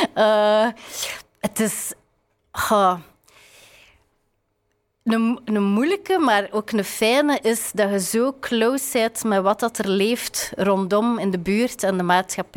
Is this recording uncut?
yes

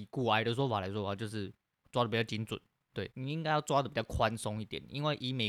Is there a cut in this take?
yes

